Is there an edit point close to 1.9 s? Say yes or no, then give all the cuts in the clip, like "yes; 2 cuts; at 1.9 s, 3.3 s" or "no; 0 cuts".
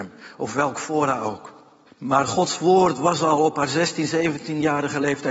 yes; 1 cut; at 1.9 s